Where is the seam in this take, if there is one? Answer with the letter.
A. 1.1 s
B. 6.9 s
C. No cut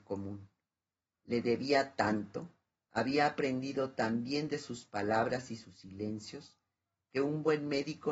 A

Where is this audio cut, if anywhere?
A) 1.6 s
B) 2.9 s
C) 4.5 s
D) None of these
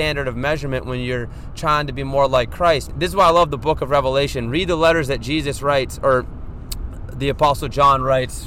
B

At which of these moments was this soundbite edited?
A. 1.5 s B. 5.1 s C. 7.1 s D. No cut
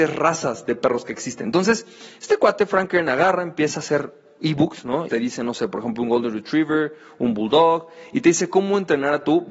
B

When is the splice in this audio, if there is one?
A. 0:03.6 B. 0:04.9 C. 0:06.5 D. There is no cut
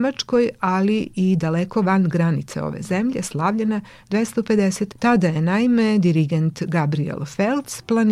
B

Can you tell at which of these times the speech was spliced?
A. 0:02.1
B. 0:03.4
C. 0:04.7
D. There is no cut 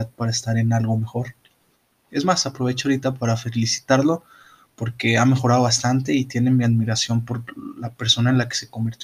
A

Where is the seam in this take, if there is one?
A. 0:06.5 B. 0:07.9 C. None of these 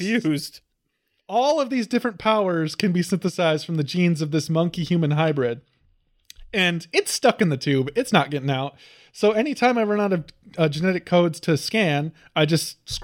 C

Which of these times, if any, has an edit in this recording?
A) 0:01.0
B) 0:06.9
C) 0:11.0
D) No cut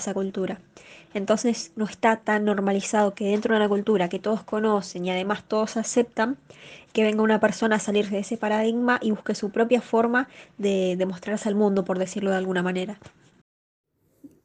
B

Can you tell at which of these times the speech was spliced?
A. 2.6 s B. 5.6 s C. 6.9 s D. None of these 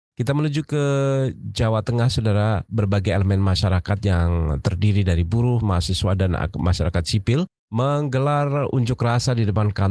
B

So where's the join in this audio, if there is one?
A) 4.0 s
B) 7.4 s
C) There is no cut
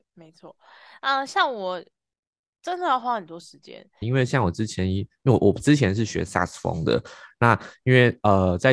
A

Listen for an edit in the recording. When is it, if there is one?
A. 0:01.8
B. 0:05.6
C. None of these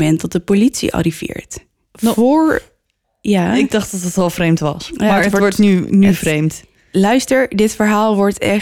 A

